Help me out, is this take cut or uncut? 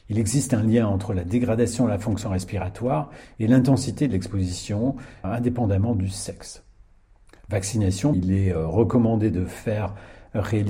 cut